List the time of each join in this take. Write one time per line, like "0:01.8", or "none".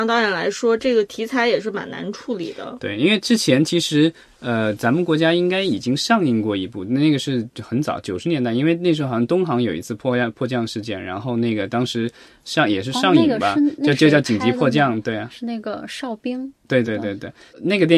0:16.8